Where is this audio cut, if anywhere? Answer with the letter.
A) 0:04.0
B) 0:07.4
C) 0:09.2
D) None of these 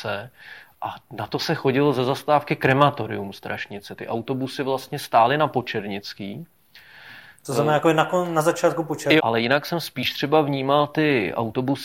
C